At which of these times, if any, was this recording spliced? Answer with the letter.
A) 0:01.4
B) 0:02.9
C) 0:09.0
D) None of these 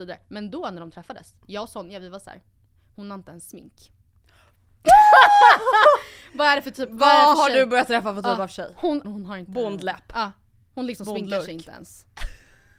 C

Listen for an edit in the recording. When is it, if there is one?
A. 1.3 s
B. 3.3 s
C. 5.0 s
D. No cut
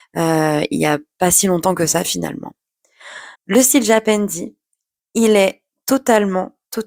B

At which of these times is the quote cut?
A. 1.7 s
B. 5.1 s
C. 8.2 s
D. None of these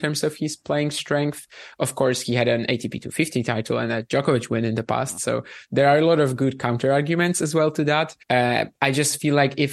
C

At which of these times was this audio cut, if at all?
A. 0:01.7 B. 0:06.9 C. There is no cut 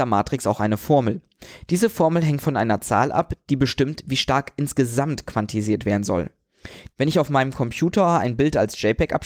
B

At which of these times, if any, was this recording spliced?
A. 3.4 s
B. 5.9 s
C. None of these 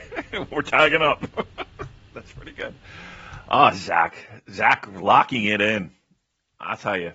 C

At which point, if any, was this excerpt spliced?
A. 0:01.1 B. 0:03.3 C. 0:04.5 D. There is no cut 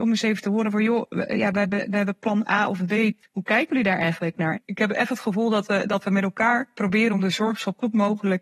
C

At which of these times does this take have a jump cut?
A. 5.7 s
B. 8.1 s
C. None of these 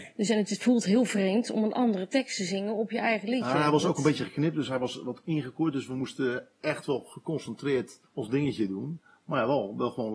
B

